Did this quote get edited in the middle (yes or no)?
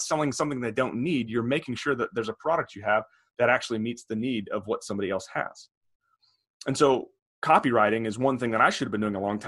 no